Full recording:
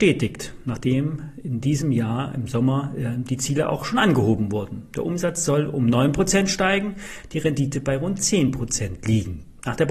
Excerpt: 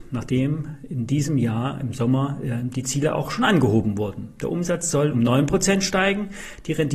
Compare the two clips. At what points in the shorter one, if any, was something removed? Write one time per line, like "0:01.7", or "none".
0:05.1